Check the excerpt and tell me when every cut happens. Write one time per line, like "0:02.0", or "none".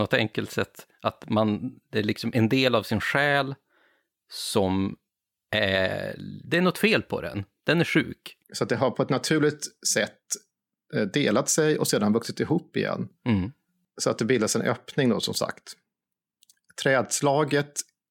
0:08.4